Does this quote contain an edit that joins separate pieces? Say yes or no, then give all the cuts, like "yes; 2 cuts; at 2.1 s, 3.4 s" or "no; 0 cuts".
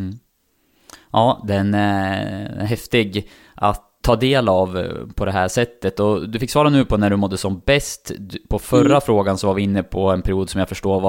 yes; 1 cut; at 4.0 s